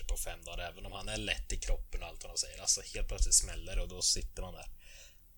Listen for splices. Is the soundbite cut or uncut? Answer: uncut